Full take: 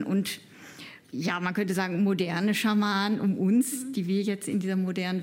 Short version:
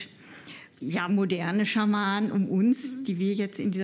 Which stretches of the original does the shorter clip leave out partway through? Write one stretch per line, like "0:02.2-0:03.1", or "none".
0:01.4-0:02.0